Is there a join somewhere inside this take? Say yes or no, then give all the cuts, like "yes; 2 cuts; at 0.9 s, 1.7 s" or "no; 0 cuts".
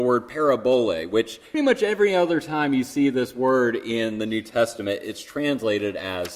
yes; 1 cut; at 1.5 s